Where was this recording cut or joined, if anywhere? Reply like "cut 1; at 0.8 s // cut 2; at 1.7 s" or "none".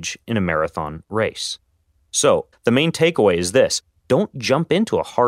cut 1; at 2.5 s